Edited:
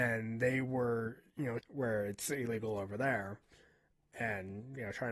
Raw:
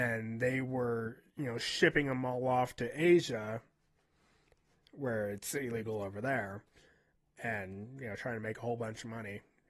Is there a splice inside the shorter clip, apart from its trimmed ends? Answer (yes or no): yes